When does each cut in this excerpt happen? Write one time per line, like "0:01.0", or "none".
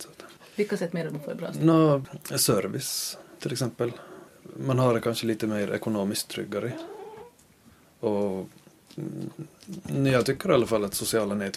none